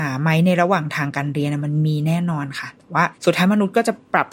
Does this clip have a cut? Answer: yes; 1 cut; at 3.1 s

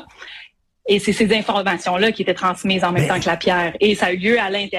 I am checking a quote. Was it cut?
no; 0 cuts

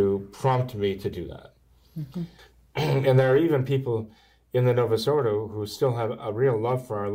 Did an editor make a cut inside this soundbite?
yes; 1 cut; at 2.4 s

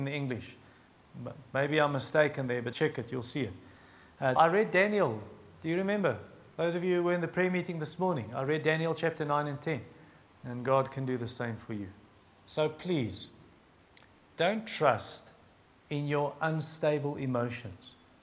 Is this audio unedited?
no; 3 cuts; at 2.7 s, 4.4 s, 10.2 s

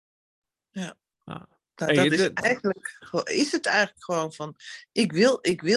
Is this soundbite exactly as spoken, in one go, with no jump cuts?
yes; 0 cuts

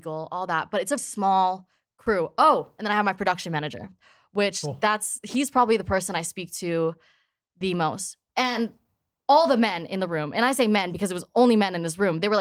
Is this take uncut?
no; 2 cuts; at 1.0 s, 8.3 s

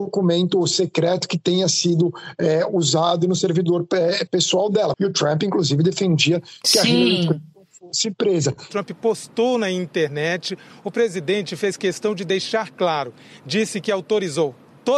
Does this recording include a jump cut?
yes; 1 cut; at 4.9 s

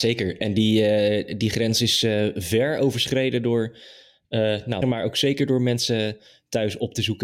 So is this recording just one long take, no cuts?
no; 1 cut; at 4.8 s

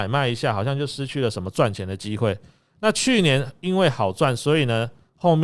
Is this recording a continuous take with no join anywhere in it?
yes; 0 cuts

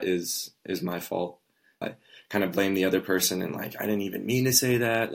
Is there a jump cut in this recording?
yes; 1 cut; at 1.8 s

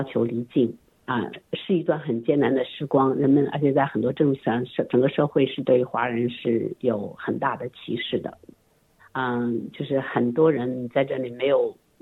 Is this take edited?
yes; 1 cut; at 9.0 s

